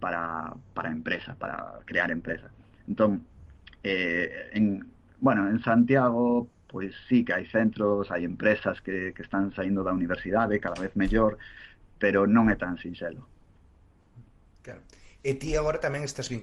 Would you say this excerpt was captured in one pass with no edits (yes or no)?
yes